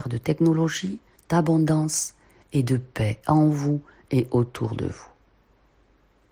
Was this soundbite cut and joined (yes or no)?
yes